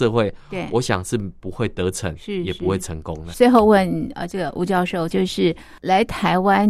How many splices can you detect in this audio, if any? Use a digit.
2